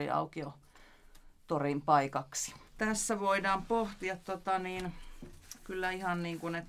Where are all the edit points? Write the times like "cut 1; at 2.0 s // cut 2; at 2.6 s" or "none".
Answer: cut 1; at 2.7 s